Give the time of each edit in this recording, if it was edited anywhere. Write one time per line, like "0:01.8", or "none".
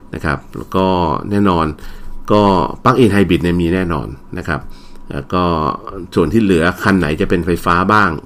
none